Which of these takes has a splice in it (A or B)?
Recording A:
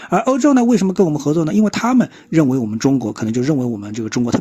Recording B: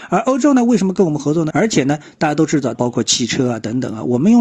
B